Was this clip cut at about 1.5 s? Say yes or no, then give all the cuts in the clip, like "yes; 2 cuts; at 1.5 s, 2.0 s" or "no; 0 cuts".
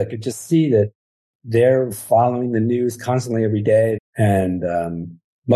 no; 1 cut; at 4.0 s